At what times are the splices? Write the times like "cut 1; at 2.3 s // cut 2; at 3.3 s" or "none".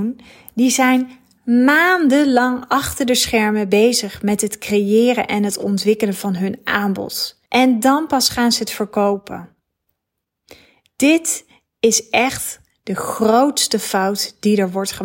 cut 1; at 7.5 s